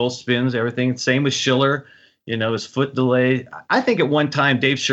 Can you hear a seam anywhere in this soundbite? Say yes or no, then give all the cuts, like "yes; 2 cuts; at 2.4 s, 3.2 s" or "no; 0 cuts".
no; 0 cuts